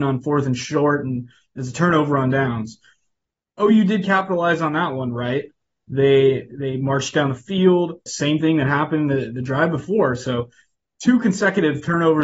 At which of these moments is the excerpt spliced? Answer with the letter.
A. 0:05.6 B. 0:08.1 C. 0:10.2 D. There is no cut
B